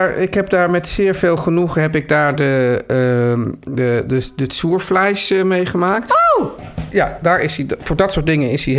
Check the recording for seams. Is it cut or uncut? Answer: uncut